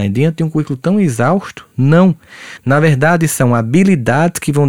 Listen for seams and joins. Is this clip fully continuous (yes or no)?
yes